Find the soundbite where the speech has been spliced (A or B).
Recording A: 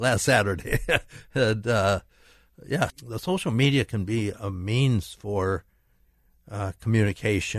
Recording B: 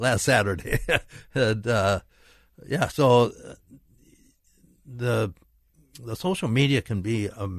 A